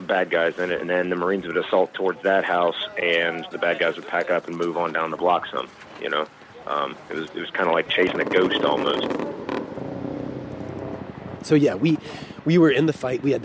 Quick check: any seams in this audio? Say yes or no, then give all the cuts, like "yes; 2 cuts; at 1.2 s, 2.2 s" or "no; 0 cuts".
yes; 1 cut; at 3.5 s